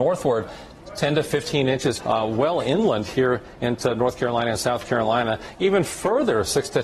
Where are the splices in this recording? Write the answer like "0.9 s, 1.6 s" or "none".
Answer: 2.0 s